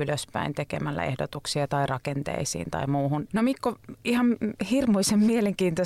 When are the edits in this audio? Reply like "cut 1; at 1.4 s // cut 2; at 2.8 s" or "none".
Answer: cut 1; at 3.3 s